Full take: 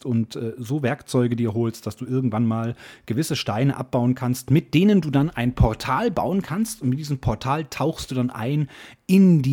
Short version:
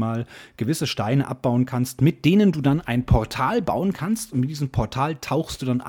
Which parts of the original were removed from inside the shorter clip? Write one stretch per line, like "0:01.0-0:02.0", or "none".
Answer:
none

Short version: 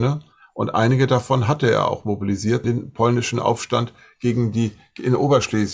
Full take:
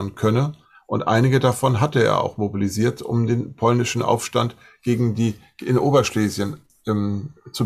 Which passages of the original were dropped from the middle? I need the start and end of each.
0:03.0-0:03.3

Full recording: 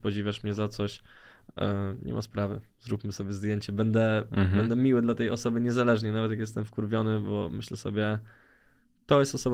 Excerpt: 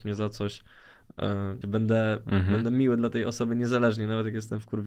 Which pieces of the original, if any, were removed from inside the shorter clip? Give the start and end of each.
0:02.0-0:03.7

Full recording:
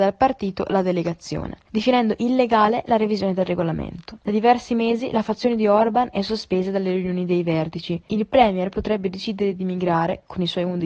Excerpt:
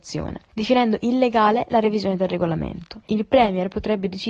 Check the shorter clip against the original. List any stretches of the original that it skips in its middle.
0:04.2-0:08.0

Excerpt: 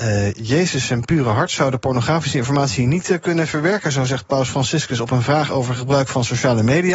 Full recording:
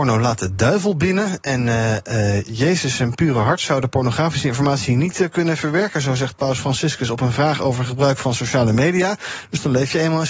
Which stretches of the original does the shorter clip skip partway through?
none

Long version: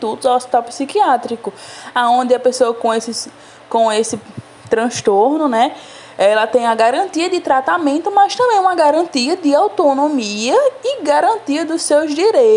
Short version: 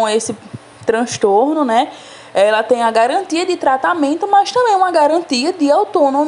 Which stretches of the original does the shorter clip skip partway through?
none

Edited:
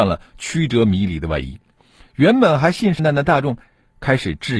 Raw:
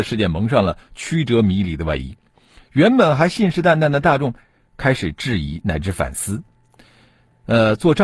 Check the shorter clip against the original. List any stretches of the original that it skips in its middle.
0:03.6-0:03.8

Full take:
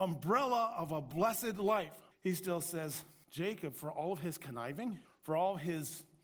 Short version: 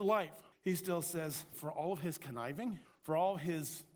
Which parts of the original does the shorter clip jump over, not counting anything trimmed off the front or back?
0:03.1-0:03.7

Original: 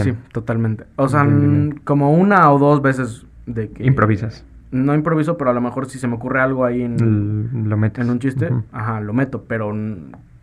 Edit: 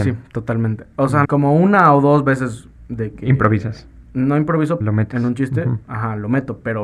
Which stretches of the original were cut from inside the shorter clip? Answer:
0:01.2-0:01.8
0:05.4-0:07.6

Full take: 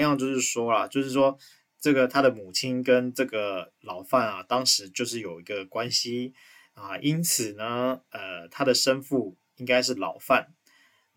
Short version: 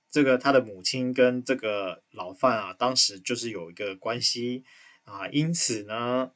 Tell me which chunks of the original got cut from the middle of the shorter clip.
none

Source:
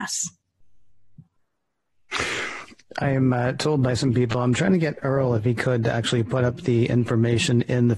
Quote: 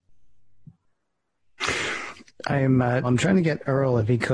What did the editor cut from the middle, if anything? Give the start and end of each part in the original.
0:03.5-0:04.4

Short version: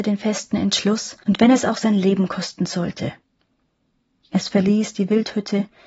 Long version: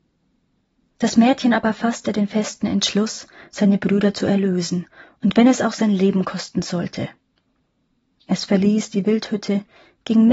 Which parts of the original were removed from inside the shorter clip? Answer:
0:03.3-0:05.2

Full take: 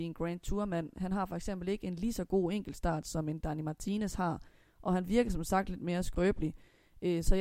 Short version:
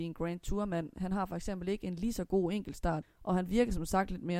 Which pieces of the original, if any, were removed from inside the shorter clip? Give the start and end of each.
0:03.0-0:04.6

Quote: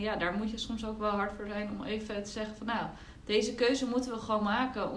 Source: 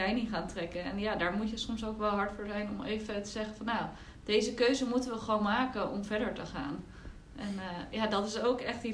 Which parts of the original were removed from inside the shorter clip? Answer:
none

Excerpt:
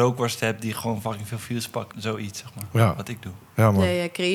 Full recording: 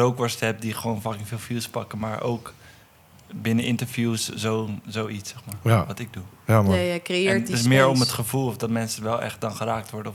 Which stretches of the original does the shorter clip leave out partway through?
0:01.9-0:04.8

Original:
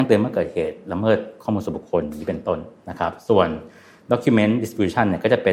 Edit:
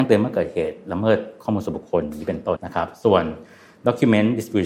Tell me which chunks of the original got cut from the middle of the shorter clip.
0:02.6-0:02.8

